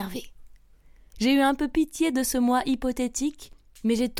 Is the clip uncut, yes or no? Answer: no